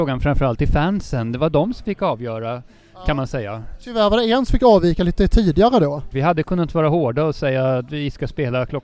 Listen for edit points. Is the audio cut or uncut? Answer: cut